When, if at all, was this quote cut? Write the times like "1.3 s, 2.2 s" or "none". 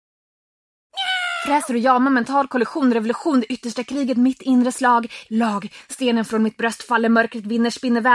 5.3 s